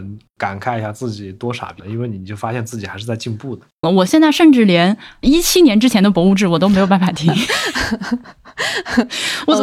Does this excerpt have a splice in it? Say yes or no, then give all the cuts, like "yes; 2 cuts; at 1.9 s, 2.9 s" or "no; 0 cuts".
yes; 2 cuts; at 1.8 s, 3.8 s